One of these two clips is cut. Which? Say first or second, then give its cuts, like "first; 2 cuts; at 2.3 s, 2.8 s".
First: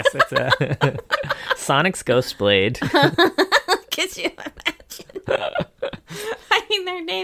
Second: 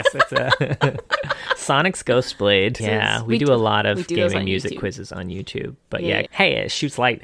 second; 2 cuts; at 2.8 s, 6.3 s